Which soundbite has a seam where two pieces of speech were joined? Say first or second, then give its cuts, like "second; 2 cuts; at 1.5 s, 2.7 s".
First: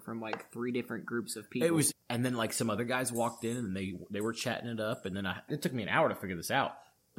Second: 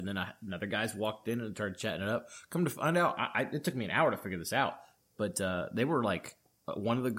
first; 2 cuts; at 1.9 s, 5.5 s